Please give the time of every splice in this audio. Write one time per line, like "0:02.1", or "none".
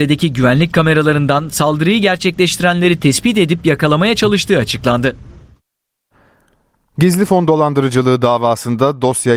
none